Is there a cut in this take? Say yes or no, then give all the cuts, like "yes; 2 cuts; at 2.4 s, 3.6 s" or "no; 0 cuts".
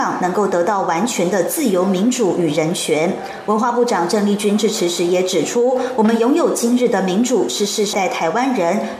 yes; 1 cut; at 7.9 s